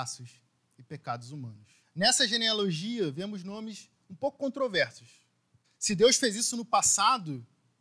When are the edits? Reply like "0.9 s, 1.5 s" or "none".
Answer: 1.8 s, 5.6 s